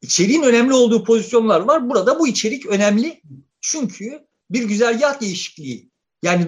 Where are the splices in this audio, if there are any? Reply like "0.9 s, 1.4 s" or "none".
none